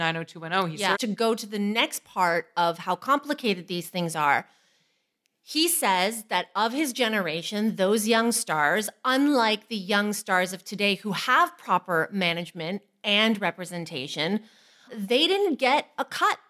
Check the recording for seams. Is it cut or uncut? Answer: cut